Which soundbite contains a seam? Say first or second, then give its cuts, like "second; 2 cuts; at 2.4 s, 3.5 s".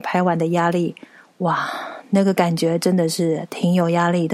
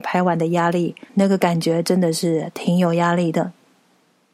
second; 1 cut; at 1.1 s